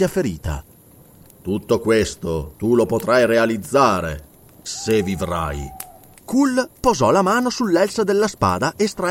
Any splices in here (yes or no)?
yes